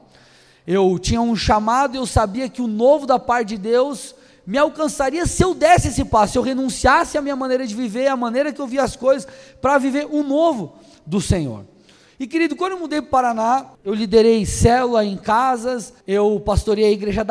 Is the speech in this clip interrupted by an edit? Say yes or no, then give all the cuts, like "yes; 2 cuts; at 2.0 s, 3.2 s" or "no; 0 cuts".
yes; 2 cuts; at 13.7 s, 16.0 s